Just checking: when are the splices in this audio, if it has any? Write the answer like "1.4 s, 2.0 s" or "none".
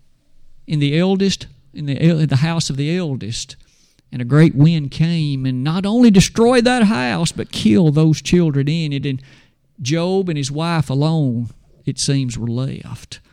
none